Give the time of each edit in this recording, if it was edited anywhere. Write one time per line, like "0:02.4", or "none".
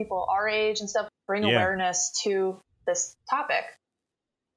0:01.1